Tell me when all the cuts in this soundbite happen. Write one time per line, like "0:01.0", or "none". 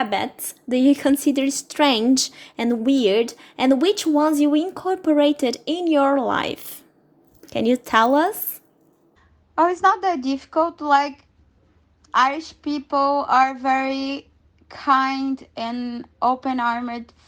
none